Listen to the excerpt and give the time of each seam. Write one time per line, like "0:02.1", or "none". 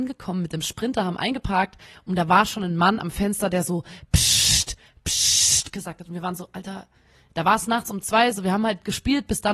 none